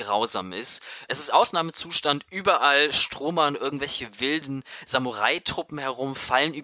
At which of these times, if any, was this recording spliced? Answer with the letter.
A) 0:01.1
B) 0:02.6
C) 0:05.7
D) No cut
A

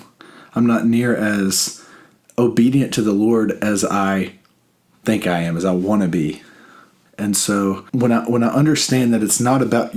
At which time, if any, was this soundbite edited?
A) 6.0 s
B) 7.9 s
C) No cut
B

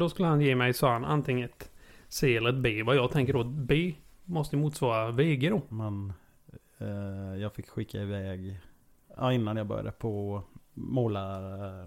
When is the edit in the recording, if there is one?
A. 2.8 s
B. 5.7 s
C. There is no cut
B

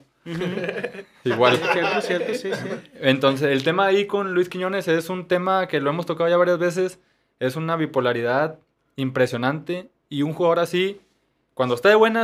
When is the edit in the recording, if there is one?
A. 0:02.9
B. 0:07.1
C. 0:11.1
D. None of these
D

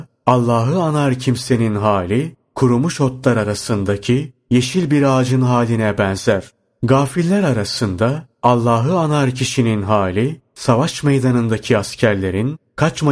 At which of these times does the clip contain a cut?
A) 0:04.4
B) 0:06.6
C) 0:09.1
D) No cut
D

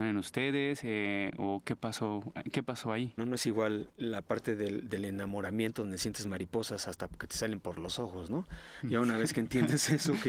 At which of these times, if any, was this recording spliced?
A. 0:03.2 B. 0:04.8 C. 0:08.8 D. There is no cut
A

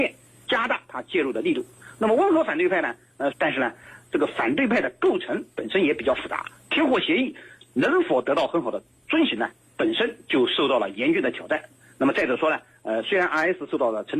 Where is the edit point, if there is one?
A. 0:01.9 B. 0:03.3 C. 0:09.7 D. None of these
B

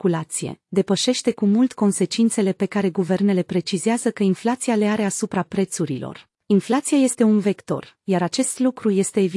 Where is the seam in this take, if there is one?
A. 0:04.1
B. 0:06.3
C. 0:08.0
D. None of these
B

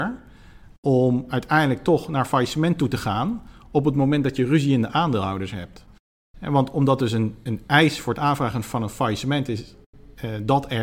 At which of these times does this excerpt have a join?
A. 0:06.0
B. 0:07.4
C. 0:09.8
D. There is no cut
B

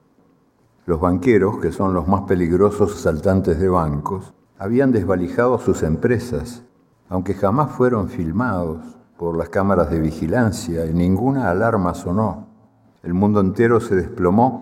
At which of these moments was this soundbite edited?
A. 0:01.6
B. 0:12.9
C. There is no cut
B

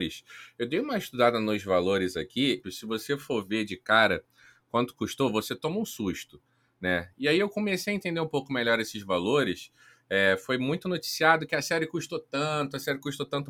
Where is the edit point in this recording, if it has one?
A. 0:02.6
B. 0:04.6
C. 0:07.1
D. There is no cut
A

